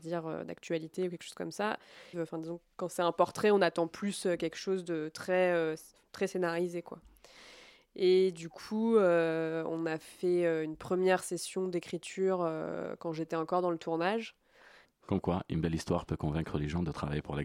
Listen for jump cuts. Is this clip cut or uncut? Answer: cut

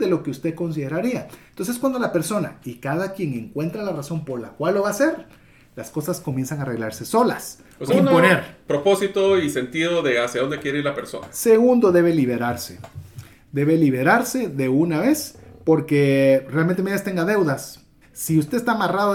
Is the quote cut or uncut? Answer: cut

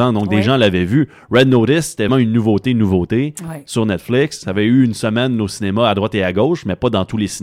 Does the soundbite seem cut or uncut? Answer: cut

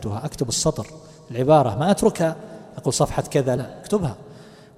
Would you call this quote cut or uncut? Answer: cut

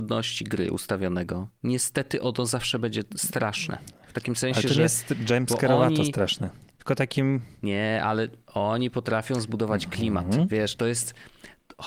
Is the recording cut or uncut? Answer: uncut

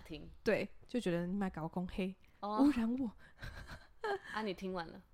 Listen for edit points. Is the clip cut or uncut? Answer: uncut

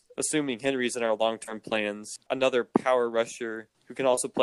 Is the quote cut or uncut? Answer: cut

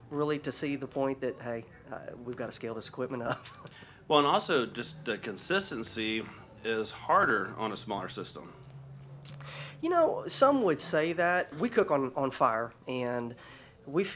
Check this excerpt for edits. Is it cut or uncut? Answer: cut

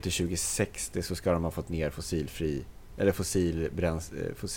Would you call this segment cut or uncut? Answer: uncut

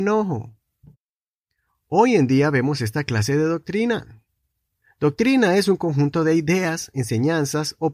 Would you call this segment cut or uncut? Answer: uncut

